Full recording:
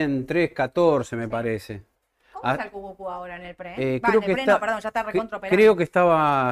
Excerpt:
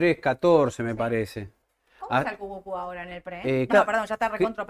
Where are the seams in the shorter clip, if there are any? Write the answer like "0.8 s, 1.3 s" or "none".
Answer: 3.7 s